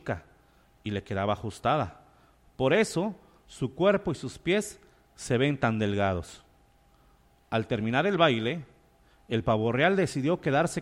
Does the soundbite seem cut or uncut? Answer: uncut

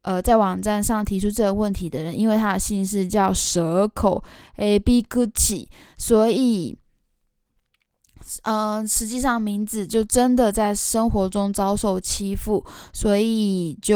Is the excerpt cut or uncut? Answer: uncut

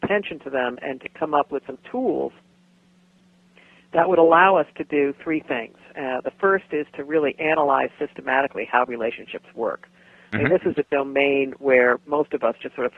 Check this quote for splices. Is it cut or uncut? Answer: uncut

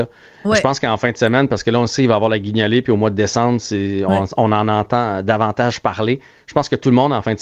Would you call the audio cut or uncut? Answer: uncut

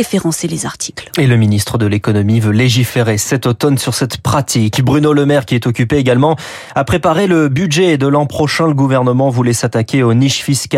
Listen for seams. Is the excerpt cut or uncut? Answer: uncut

